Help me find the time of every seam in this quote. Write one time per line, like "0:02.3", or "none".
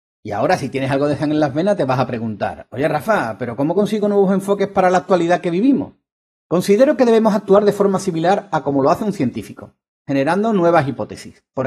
none